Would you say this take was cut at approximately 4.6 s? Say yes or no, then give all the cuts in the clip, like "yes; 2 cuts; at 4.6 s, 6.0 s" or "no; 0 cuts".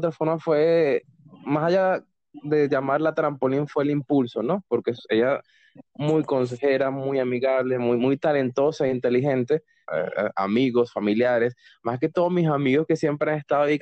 no; 2 cuts; at 7.8 s, 9.9 s